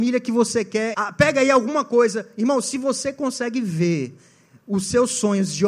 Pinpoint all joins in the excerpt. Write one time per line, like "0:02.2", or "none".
0:00.9